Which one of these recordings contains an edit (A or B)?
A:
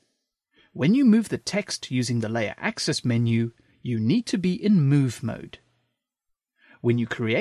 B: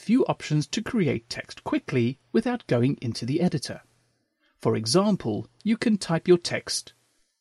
B